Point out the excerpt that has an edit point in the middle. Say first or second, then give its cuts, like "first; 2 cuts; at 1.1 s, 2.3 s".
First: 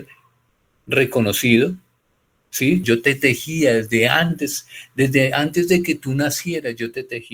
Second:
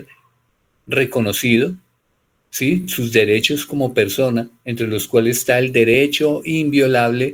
first; 1 cut; at 2.8 s